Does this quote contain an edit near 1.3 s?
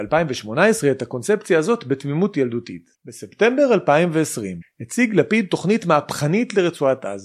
no; 2 cuts; at 2.9 s, 4.6 s

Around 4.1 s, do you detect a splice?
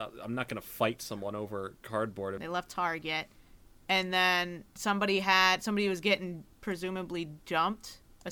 no; 2 cuts; at 2.4 s, 6.5 s

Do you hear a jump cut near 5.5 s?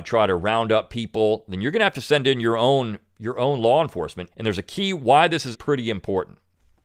yes; 2 cuts; at 4.3 s, 5.5 s

